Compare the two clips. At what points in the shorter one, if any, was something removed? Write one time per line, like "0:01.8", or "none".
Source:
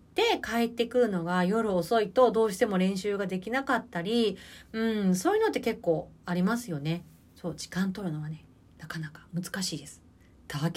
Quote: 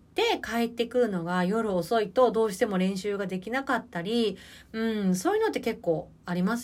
none